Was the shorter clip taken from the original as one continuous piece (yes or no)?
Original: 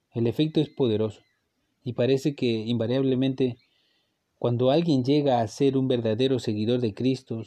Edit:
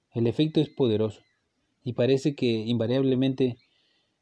yes